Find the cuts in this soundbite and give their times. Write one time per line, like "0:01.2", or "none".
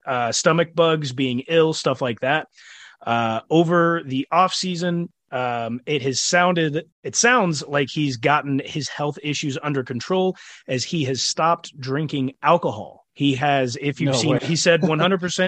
0:06.9
0:13.1
0:14.4